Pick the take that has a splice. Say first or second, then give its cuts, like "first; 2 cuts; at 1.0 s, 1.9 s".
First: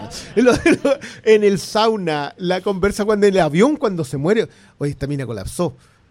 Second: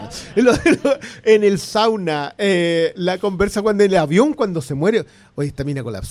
first; 1 cut; at 2.4 s